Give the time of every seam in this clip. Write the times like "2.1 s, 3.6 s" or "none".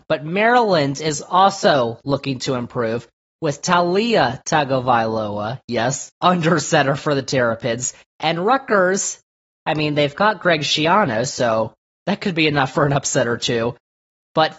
6.1 s